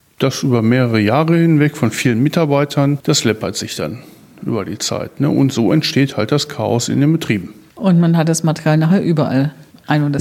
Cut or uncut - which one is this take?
uncut